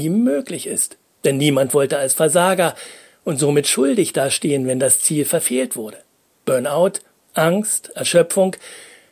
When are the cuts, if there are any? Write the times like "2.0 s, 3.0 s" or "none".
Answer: 1.2 s